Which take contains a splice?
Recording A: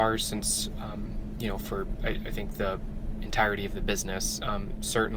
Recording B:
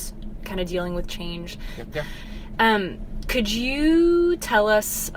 B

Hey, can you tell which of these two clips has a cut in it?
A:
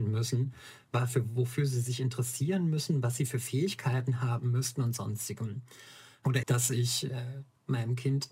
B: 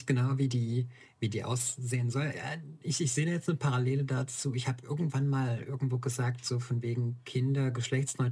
A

